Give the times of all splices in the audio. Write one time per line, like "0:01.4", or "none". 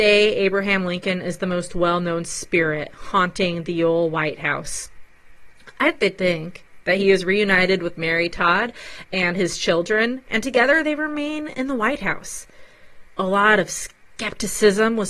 0:05.9
0:13.1